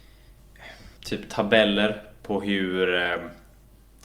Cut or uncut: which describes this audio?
cut